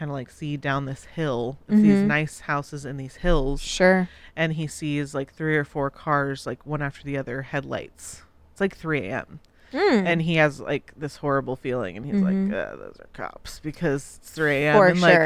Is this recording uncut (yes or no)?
yes